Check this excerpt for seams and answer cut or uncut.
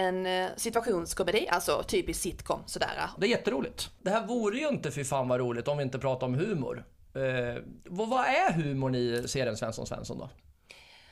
cut